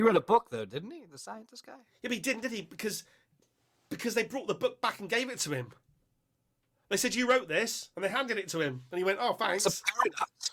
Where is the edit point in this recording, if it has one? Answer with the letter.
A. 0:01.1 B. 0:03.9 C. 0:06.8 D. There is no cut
D